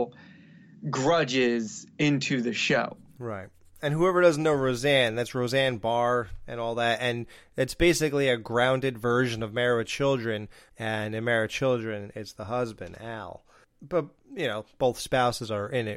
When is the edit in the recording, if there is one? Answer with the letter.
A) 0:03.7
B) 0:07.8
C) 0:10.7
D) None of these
C